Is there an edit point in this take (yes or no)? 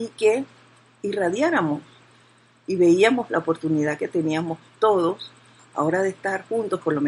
no